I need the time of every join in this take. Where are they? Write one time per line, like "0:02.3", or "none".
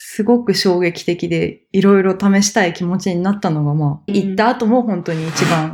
0:04.1